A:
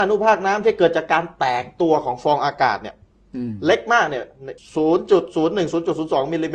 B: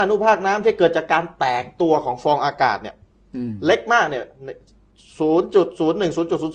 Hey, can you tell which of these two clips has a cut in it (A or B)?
A